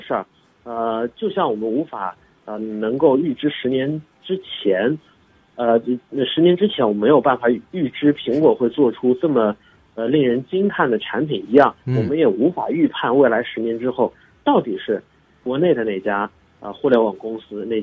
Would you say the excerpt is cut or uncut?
cut